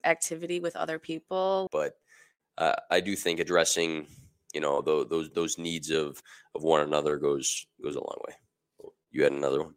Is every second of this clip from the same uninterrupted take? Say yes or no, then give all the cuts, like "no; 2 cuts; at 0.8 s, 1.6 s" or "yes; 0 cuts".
no; 1 cut; at 1.7 s